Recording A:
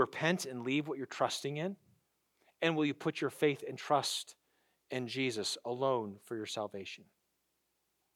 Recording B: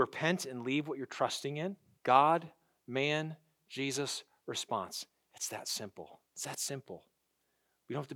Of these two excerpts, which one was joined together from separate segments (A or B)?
B